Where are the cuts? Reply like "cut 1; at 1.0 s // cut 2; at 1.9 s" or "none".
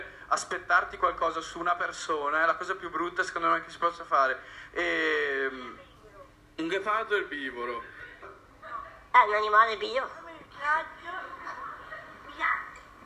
cut 1; at 4.7 s // cut 2; at 8.2 s